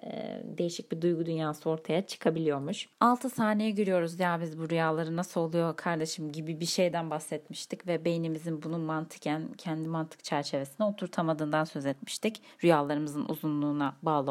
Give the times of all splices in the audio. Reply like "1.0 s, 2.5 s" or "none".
2.9 s

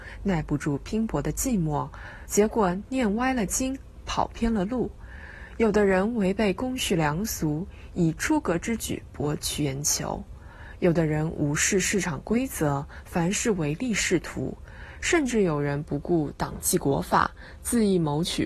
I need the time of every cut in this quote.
2.3 s

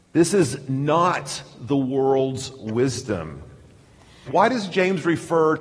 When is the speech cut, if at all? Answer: 4.3 s

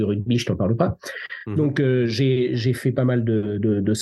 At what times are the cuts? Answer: none

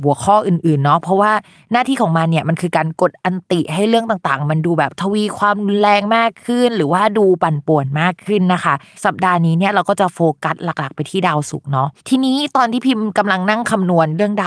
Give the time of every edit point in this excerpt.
12.0 s

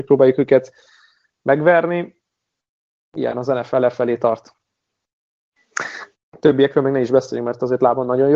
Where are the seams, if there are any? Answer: 6.1 s

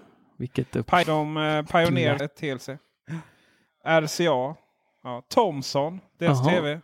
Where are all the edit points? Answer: 1.0 s, 2.2 s

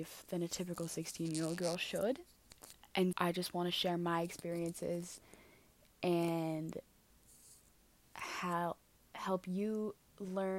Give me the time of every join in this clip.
3.1 s

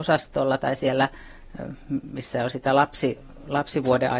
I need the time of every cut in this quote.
none

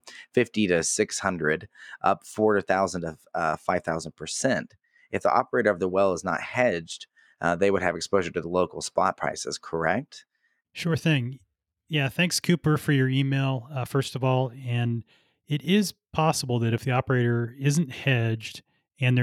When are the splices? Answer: 10.6 s

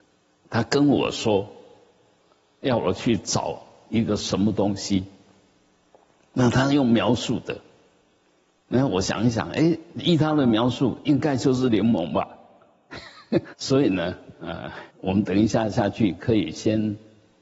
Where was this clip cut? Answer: 13.5 s, 14.9 s

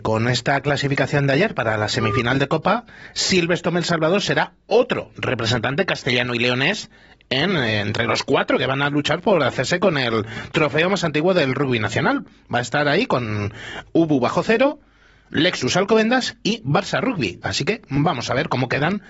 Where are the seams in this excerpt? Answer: none

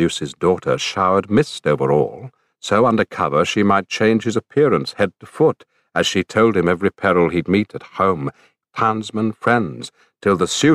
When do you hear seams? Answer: 8.6 s

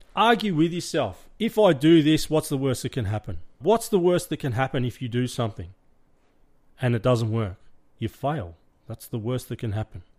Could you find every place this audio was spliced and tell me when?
3.6 s

